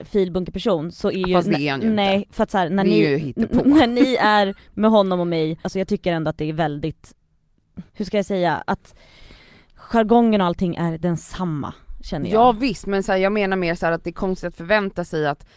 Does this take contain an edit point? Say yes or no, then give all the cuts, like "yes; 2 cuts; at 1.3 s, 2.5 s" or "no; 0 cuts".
yes; 2 cuts; at 5.6 s, 7.9 s